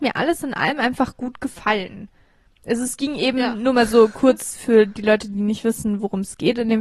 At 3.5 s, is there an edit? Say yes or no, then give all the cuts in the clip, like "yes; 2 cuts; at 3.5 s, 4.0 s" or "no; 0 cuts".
no; 0 cuts